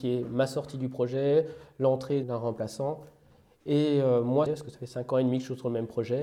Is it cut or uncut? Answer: cut